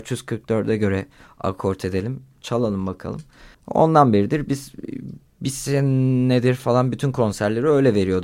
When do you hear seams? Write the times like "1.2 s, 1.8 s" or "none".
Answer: 3.5 s